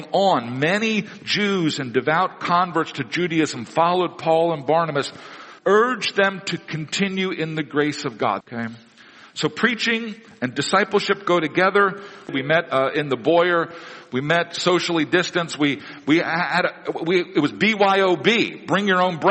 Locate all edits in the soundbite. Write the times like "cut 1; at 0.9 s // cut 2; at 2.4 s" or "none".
cut 1; at 5.6 s // cut 2; at 8.4 s // cut 3; at 12.3 s